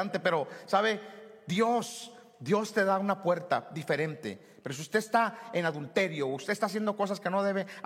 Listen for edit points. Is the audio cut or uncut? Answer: uncut